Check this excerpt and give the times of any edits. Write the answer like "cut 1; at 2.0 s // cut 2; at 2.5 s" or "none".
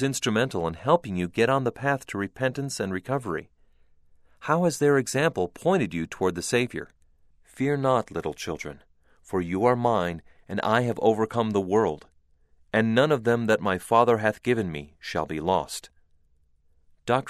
cut 1; at 7.3 s